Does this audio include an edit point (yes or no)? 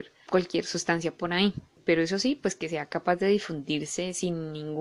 no